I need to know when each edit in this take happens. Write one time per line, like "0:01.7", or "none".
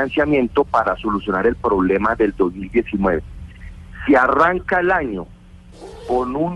none